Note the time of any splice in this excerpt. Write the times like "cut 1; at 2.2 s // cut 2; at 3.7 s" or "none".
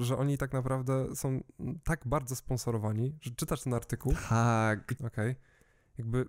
cut 1; at 5.0 s